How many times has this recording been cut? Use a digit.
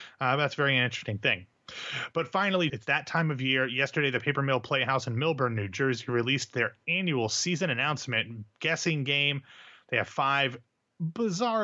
1